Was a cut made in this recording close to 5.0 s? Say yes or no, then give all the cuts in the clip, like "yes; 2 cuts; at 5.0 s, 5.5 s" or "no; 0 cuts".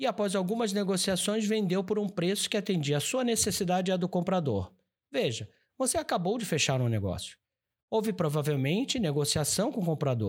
no; 0 cuts